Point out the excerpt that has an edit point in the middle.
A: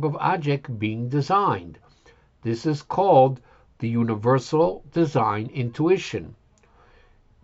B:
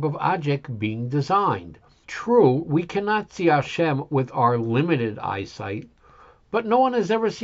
B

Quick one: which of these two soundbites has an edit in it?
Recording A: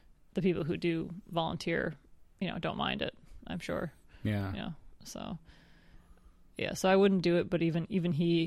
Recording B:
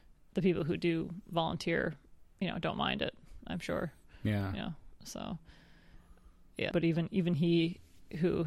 B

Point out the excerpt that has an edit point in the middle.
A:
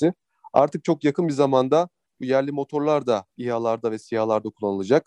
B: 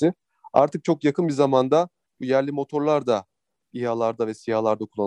A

